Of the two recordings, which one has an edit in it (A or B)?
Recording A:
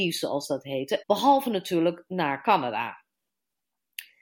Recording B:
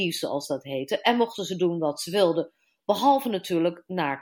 A